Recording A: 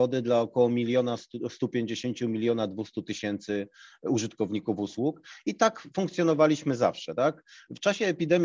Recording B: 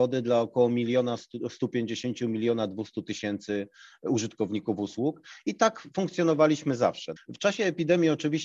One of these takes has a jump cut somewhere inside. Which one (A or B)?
B